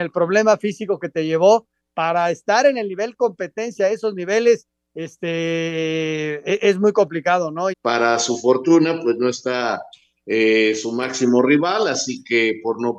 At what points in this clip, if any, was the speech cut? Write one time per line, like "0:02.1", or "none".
0:07.7